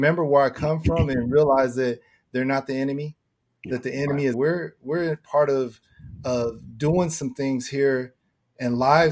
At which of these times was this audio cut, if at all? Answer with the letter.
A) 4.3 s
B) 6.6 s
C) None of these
A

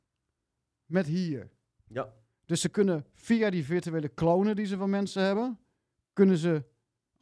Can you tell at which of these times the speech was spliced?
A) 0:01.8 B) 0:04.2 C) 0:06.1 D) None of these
D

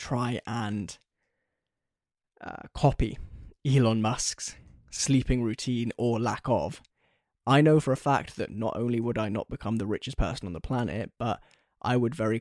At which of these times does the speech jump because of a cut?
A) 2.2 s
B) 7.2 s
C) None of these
C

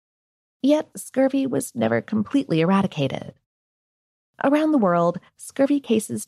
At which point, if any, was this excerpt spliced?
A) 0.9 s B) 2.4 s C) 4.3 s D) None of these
A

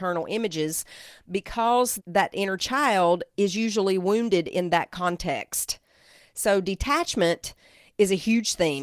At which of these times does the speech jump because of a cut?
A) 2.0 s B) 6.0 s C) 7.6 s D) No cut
A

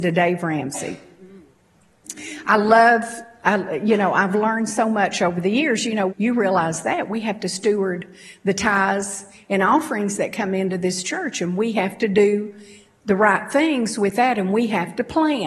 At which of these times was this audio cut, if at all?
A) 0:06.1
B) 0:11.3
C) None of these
A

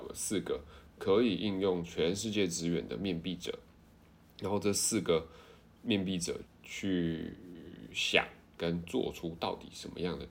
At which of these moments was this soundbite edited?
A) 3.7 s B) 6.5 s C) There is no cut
B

